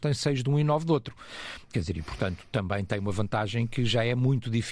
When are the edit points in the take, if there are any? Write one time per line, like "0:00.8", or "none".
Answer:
none